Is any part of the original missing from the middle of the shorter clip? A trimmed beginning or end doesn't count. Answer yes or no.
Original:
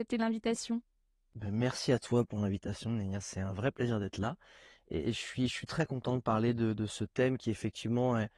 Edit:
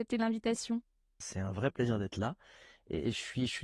yes